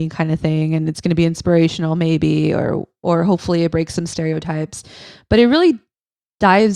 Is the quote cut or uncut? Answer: uncut